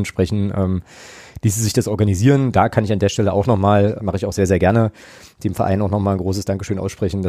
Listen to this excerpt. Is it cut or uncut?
cut